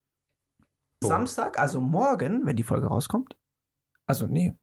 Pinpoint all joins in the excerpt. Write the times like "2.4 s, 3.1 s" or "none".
1.0 s